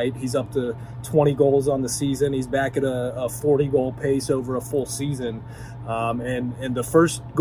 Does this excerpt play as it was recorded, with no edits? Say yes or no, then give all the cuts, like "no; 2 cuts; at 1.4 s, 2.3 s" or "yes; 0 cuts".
yes; 0 cuts